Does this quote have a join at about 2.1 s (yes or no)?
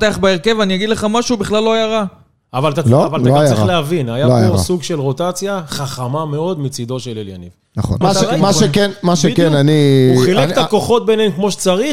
no